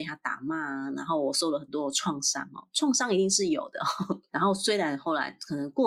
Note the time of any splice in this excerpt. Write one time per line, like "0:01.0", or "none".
0:04.3